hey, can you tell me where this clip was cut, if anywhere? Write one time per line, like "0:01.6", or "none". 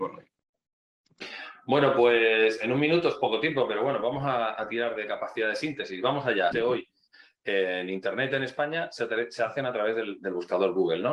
0:06.5
0:10.2

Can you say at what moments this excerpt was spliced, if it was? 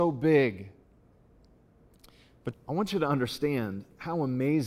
0:02.5

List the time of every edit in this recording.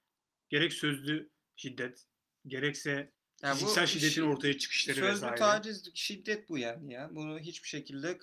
none

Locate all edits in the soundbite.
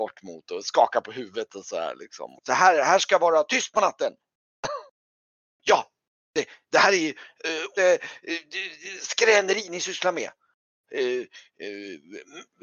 0:02.4
0:05.5
0:07.8

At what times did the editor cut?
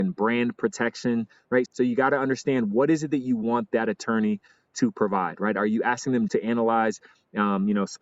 0:01.7
0:06.3

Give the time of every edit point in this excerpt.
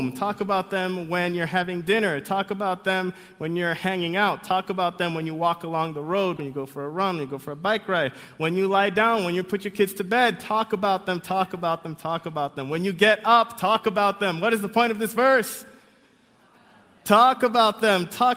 0:06.4

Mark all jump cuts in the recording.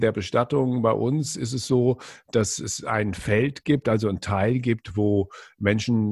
none

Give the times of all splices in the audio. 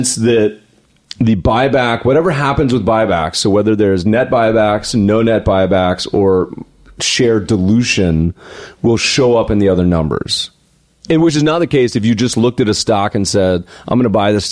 none

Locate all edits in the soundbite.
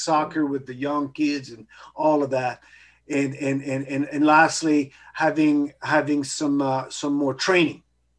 none

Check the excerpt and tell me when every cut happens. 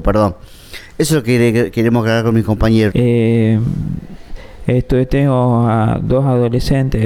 0:02.9

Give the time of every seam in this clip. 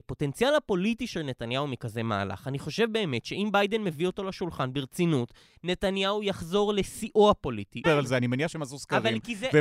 0:07.8

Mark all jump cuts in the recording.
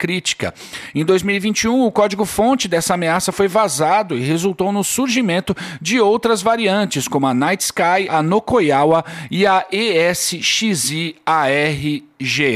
0:08.1

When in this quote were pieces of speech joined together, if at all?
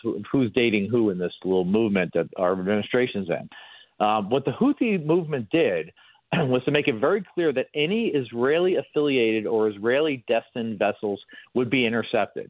none

